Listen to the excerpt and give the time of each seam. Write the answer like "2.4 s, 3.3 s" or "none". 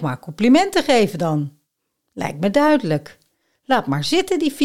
none